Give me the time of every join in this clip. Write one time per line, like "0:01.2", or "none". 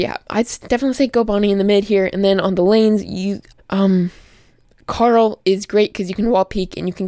0:03.5